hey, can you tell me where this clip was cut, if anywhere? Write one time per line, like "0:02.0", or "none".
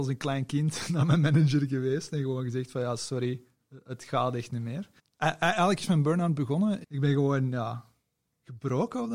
0:05.0
0:06.8